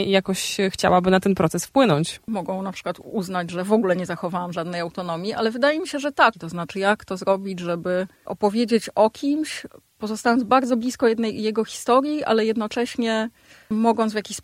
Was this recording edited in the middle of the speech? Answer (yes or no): yes